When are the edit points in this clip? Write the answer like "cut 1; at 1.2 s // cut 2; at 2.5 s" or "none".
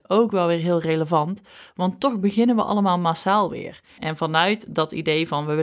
cut 1; at 4.0 s